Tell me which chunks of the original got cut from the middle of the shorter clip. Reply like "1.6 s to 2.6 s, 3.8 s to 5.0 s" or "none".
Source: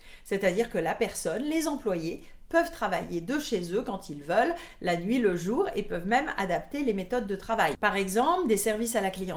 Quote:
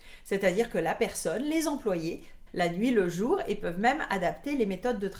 2.5 s to 4.7 s